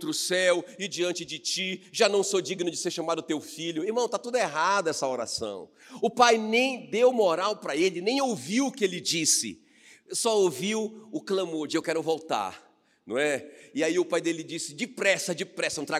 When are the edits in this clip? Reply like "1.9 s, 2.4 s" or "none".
none